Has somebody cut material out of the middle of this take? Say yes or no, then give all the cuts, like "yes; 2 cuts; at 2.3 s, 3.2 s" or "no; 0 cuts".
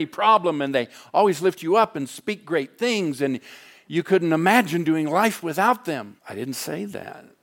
yes; 1 cut; at 6.2 s